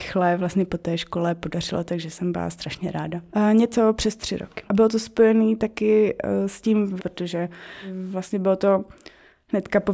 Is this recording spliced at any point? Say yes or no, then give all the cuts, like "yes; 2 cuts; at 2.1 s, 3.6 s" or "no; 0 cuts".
yes; 3 cuts; at 3.3 s, 4.7 s, 7.0 s